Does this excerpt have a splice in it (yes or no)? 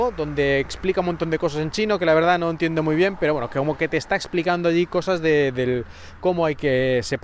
no